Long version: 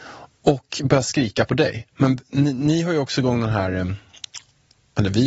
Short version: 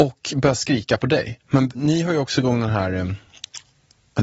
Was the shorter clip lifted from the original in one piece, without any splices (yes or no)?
no